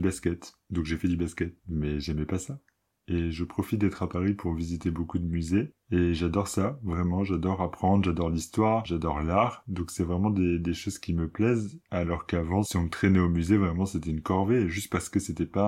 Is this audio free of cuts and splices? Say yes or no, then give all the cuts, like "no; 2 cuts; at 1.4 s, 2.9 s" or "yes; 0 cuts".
yes; 0 cuts